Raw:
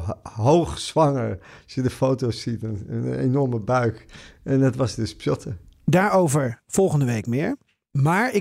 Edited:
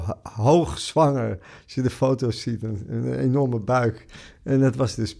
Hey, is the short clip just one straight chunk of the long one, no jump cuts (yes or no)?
yes